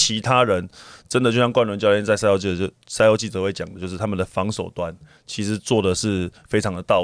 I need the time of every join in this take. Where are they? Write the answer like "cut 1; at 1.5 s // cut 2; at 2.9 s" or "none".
none